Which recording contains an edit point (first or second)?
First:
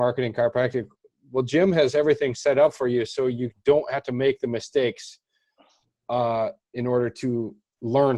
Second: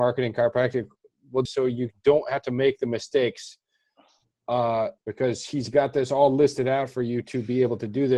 second